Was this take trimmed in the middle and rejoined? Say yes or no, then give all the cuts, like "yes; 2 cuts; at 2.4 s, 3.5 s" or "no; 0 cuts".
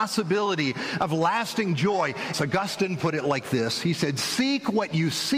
yes; 1 cut; at 2.3 s